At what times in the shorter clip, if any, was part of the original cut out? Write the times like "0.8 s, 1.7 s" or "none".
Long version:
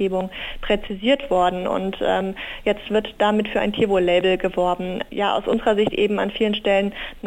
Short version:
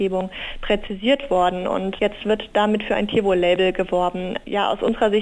2.0 s